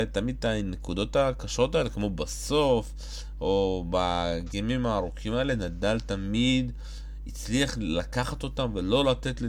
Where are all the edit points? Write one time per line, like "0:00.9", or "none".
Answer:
none